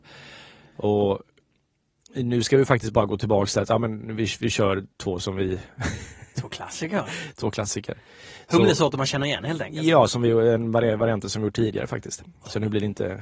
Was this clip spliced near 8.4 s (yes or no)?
no